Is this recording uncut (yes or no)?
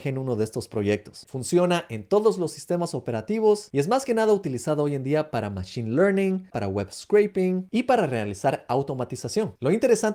no